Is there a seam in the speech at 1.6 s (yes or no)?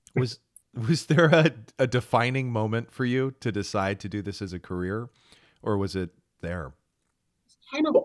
no